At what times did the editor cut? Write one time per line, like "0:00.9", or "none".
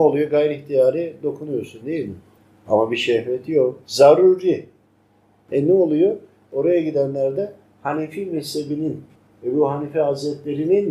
0:03.8